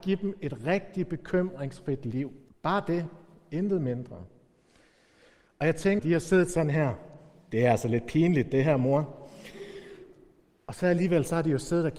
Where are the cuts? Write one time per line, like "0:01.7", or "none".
0:02.5
0:06.0